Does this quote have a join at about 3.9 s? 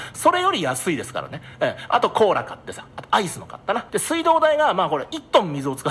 yes; 1 cut; at 3.9 s

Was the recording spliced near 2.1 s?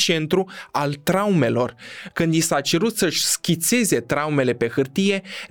yes; 1 cut; at 2.1 s

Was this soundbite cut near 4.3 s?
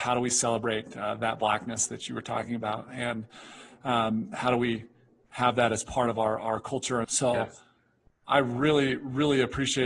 no; 1 cut; at 7.0 s

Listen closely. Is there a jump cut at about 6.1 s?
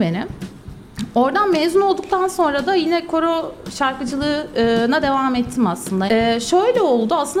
yes; 1 cut; at 6.1 s

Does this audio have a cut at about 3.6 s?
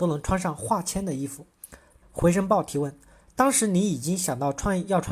no; 1 cut; at 2.0 s

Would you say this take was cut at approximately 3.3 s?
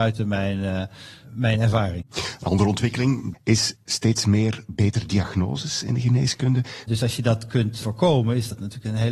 yes; 2 cuts; at 3.3 s, 6.8 s

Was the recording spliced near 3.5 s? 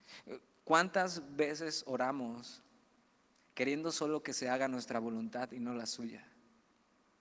no; 0 cuts

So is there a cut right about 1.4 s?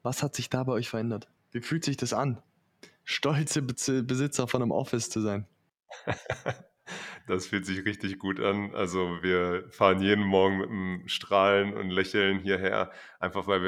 yes; 1 cut; at 1.4 s

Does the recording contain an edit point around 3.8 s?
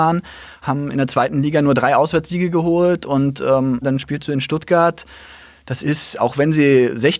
yes; 1 cut; at 3.8 s

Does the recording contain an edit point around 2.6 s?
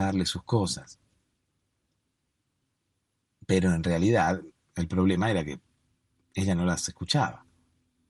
no; 0 cuts

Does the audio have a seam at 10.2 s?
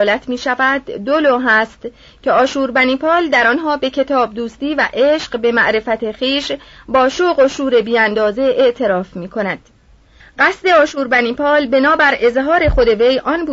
yes; 1 cut; at 10.2 s

